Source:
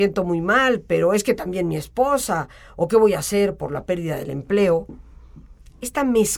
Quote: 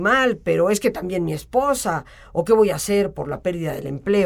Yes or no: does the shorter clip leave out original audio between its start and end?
no